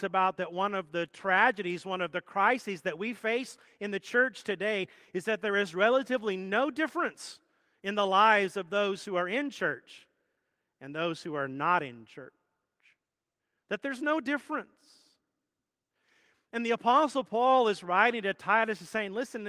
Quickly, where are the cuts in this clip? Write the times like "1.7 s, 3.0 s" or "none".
none

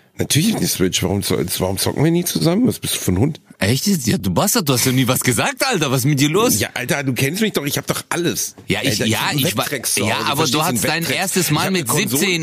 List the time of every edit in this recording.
none

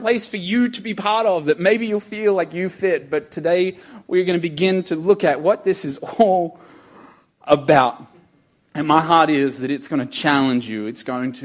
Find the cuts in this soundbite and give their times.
none

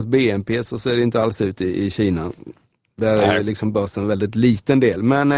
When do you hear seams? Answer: none

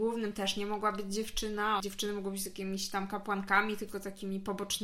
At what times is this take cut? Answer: 1.8 s

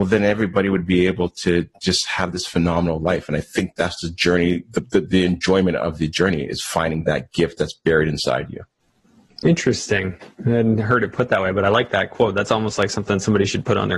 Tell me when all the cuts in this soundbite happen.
none

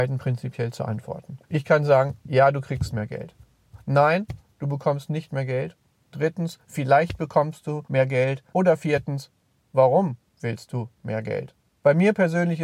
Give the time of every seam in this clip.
1.4 s

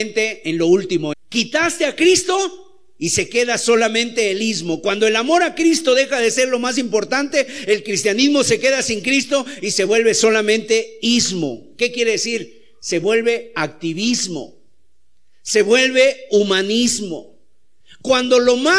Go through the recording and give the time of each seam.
1.1 s

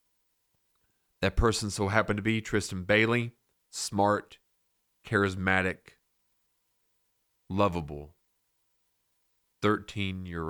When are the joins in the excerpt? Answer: 3.6 s

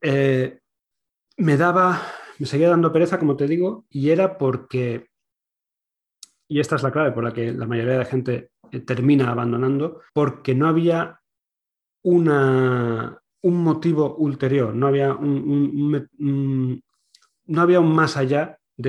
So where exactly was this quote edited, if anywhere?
3.9 s, 10.1 s

